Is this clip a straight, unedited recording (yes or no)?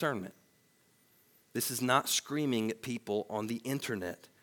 yes